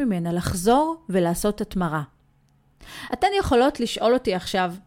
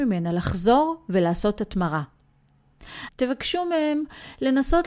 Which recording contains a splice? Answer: second; 1 cut; at 3.1 s

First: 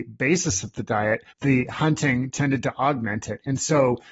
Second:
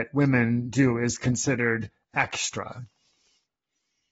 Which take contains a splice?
first; 1 cut; at 1.3 s

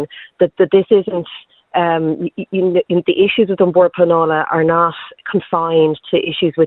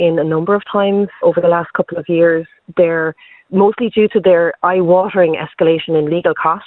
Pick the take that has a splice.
second; 1 cut; at 1.2 s

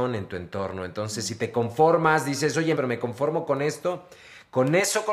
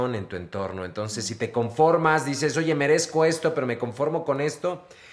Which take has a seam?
first; 1 cut; at 2.8 s

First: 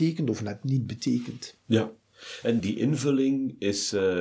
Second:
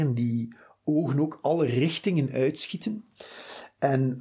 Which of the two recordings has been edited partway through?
first; 1 cut; at 2.6 s

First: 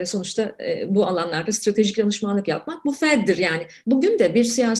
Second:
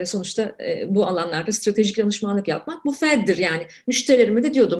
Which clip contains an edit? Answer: first; 1 cut; at 3.8 s

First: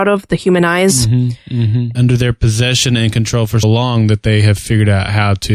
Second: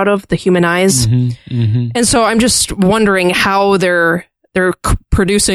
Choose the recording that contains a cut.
first; 2 cuts; at 1.9 s, 3.6 s

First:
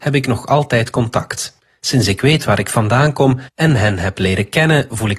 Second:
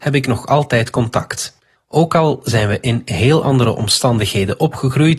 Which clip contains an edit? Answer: second; 1 cut; at 1.8 s

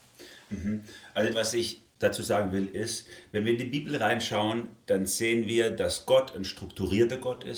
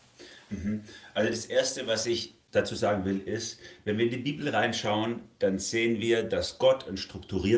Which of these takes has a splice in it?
first; 1 cut; at 1.3 s

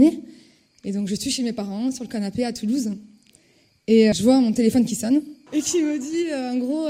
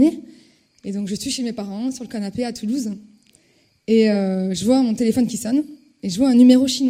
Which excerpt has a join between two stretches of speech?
first; 2 cuts; at 4.1 s, 5.5 s

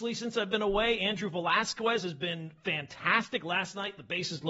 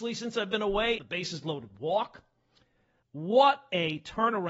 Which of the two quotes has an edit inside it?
second; 2 cuts; at 1.0 s, 3.0 s

